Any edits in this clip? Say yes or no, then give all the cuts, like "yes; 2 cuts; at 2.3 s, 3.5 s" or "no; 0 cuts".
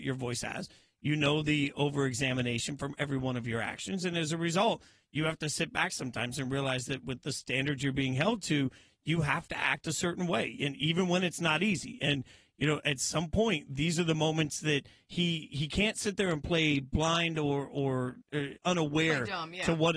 no; 0 cuts